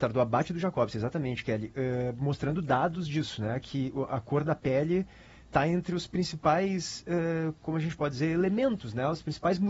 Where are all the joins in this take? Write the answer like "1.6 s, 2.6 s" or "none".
none